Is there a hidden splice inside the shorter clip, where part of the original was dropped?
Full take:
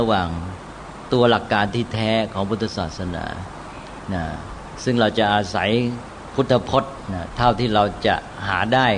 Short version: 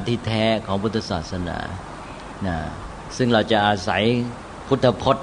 no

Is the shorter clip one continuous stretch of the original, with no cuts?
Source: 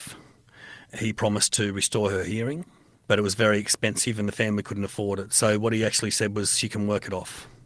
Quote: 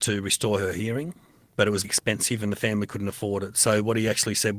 no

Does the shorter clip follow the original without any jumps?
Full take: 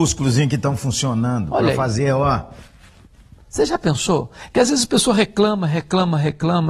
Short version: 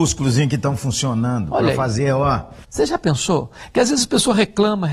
no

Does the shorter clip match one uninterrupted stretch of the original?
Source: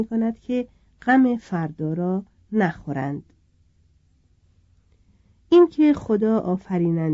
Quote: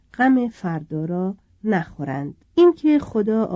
no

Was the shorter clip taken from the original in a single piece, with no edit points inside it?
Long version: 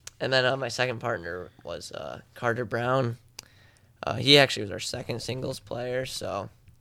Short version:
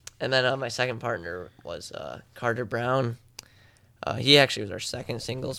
yes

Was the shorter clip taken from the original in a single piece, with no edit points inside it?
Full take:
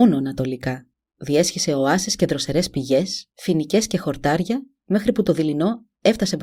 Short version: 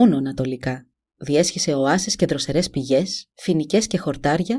yes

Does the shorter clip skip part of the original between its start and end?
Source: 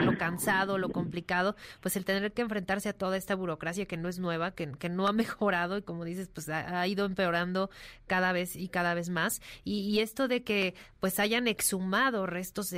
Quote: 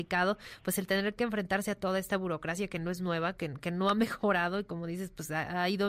no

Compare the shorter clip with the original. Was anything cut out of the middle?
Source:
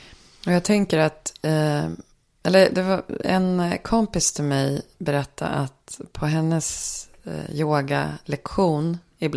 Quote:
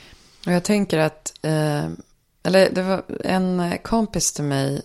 no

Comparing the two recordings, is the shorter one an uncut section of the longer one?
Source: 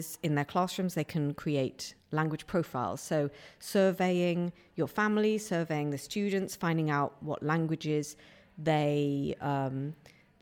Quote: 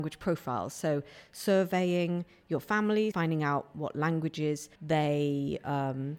no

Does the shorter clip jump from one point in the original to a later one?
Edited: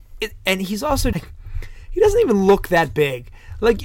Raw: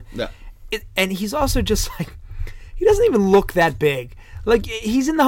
yes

